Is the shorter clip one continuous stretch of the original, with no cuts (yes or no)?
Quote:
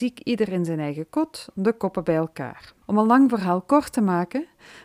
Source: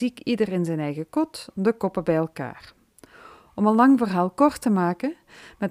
no